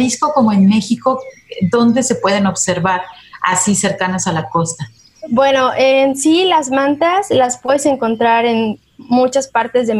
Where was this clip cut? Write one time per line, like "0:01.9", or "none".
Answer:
none